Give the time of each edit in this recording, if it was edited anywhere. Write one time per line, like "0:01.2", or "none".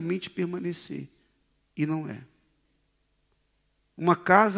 none